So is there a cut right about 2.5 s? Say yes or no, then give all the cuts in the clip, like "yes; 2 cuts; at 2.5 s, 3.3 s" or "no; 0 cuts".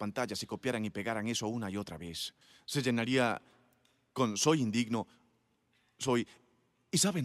no; 0 cuts